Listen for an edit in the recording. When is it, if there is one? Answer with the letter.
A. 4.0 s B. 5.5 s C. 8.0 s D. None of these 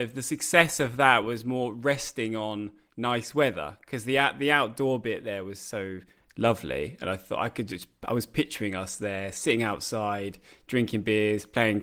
D